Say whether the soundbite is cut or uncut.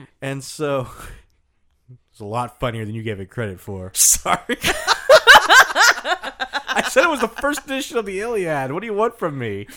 cut